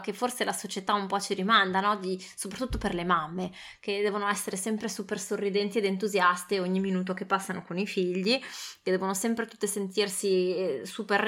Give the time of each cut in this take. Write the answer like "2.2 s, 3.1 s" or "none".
none

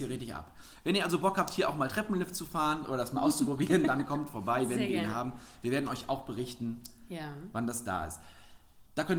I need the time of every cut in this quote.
none

